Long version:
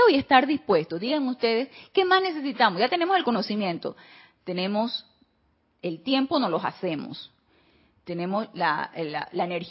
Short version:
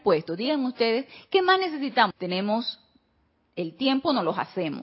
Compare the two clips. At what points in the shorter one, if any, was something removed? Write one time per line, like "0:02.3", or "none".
0:02.1